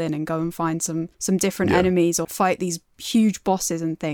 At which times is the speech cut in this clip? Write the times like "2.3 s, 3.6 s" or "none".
1.1 s, 2.2 s